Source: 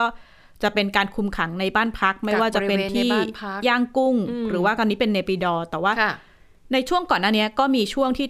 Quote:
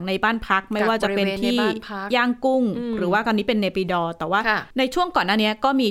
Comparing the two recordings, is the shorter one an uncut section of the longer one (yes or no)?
no